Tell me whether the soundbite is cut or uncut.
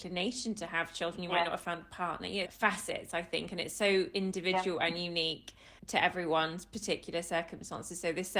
cut